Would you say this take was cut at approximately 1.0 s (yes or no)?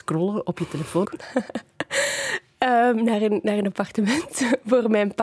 yes